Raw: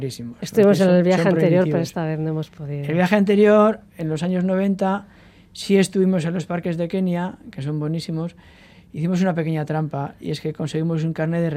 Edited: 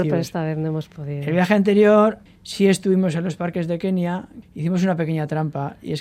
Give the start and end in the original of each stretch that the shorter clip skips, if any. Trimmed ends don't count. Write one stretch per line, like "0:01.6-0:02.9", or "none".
0:03.9-0:05.4
0:07.5-0:08.8